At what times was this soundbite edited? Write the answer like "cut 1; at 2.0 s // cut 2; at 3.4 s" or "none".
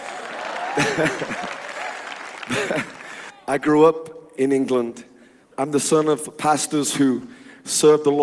cut 1; at 3.3 s